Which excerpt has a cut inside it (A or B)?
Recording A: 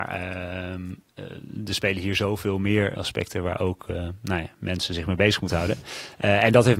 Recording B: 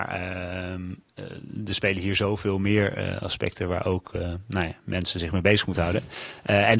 A